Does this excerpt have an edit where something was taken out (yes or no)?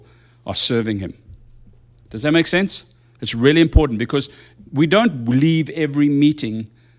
no